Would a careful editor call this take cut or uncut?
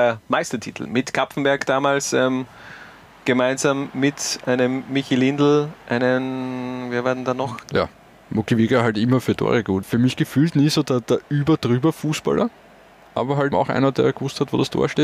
cut